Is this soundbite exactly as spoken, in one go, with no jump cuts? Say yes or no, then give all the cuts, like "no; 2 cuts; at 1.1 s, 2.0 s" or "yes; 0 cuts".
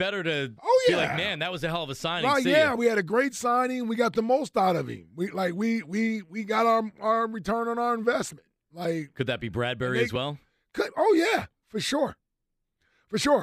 yes; 0 cuts